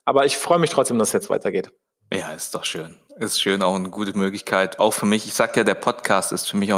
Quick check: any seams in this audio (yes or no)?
no